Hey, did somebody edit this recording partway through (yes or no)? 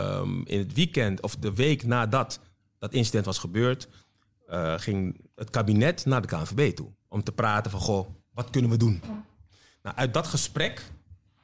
no